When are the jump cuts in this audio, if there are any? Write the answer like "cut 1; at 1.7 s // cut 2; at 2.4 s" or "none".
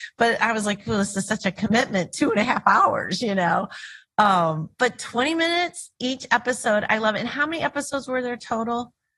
none